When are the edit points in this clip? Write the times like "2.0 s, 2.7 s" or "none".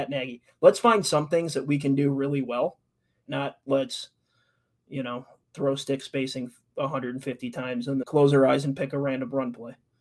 3.3 s, 8.0 s